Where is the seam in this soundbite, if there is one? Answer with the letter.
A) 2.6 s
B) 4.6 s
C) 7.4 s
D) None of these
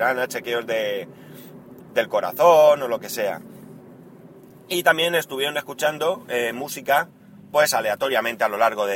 D